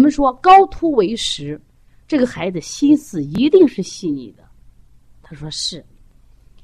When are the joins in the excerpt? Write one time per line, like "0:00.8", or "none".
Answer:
0:05.2